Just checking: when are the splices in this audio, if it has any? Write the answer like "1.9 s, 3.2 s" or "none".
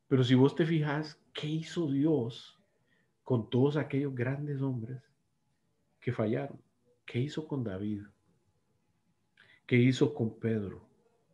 none